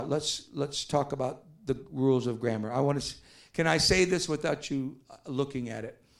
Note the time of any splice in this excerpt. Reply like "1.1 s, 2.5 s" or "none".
none